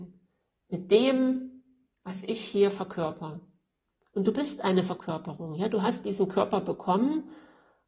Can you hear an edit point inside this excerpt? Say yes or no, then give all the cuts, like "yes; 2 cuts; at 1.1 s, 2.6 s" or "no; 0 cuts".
no; 0 cuts